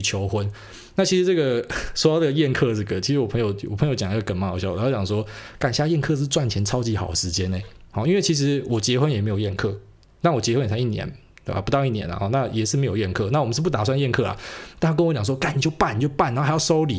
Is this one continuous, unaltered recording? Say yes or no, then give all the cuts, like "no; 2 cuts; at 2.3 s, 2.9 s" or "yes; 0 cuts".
yes; 0 cuts